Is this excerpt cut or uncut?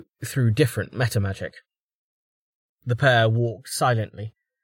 cut